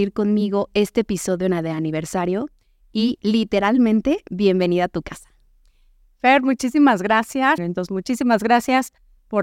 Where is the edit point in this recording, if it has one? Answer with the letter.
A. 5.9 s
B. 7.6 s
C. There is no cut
B